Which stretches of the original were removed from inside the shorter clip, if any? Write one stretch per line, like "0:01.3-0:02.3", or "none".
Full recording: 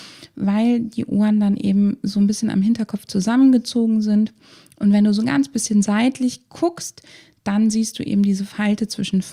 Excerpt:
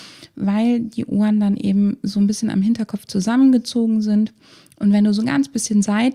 none